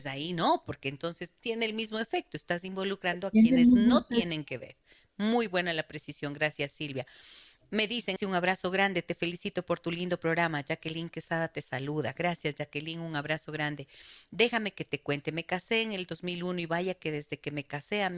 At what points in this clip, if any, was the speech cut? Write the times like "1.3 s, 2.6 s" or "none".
8.2 s